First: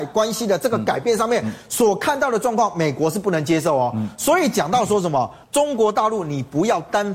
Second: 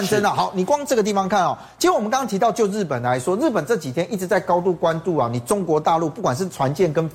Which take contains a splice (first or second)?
first